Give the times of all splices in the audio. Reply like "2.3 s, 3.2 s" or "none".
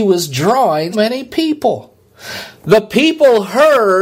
0.9 s